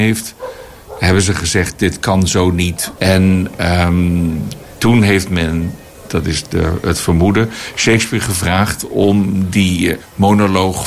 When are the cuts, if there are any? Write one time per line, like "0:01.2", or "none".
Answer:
0:03.0